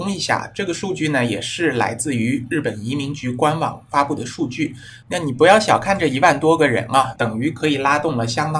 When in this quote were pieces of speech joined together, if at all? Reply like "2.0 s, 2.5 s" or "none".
5.0 s, 7.2 s